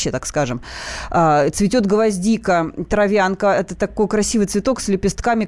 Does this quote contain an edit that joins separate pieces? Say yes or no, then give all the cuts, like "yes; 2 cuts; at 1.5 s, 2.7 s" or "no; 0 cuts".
no; 0 cuts